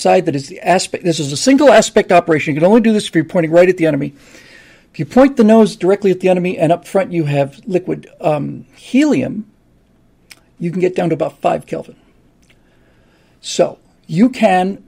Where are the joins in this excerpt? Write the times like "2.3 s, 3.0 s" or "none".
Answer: none